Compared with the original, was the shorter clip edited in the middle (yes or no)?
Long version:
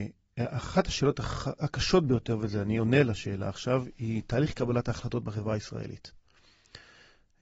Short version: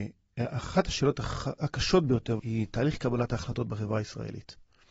yes